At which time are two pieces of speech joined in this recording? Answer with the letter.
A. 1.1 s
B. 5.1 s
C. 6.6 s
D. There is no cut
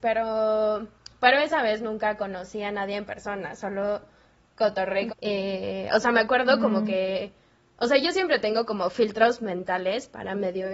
B